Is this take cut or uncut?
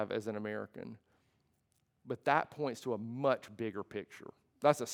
uncut